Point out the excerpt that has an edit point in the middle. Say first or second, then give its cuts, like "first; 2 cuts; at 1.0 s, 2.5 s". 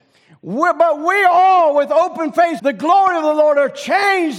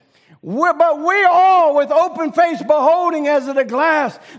first; 1 cut; at 2.6 s